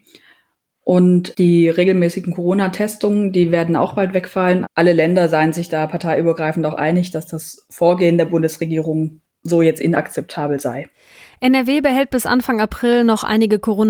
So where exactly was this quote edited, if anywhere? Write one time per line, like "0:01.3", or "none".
0:04.6